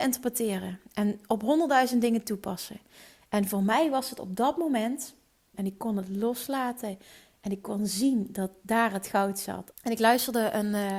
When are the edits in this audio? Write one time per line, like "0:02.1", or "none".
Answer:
0:05.5
0:09.7